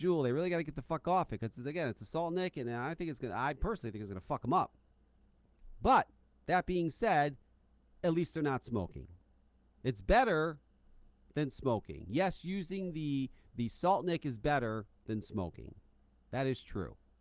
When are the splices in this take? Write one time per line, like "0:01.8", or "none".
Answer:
none